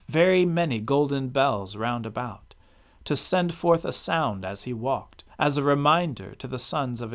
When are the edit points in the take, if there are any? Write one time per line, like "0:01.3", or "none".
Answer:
0:05.3